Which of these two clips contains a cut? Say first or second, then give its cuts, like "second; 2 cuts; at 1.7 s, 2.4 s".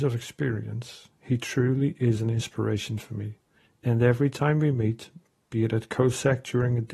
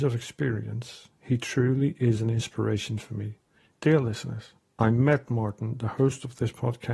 second; 1 cut; at 3.7 s